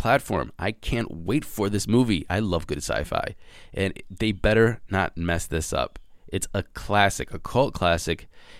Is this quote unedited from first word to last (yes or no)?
no